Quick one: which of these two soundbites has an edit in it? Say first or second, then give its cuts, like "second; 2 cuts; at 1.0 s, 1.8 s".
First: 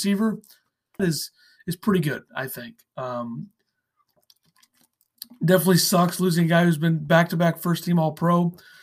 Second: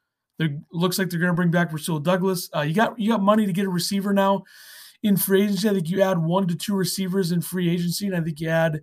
first; 1 cut; at 1.0 s